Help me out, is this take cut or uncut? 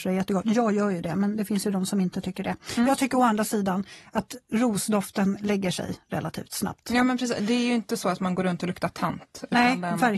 uncut